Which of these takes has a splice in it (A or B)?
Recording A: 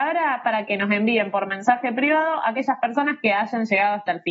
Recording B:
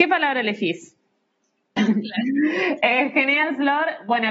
B